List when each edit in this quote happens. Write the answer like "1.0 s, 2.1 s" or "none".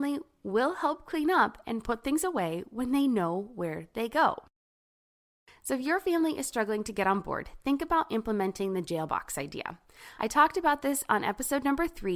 none